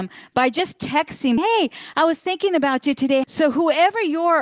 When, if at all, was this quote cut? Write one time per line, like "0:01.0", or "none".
0:01.4
0:03.2